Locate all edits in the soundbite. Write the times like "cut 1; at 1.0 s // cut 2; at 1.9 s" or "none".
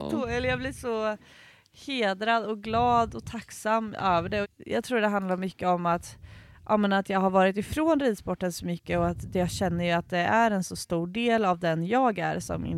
cut 1; at 4.4 s